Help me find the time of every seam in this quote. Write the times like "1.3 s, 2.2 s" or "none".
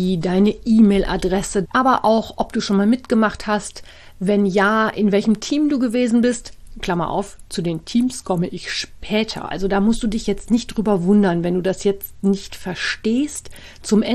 1.6 s, 9.5 s